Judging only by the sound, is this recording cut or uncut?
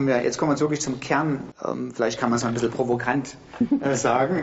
cut